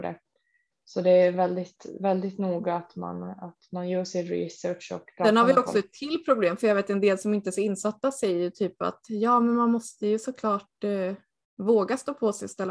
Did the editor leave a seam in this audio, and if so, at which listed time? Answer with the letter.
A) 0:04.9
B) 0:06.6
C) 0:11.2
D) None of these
D